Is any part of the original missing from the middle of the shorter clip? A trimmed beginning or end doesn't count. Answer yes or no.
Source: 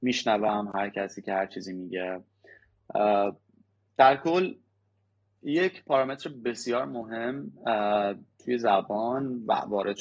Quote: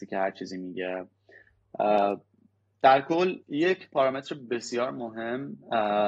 yes